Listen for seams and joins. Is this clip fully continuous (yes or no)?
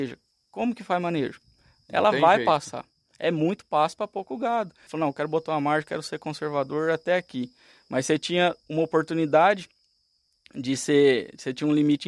no